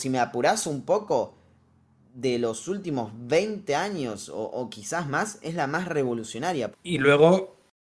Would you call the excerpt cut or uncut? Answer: cut